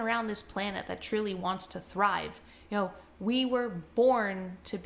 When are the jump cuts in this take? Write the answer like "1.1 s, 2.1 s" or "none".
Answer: none